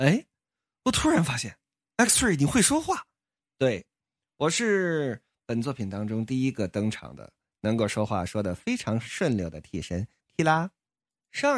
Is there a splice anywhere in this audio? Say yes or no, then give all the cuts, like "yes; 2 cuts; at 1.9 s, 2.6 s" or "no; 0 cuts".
no; 0 cuts